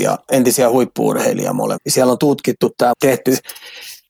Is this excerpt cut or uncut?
cut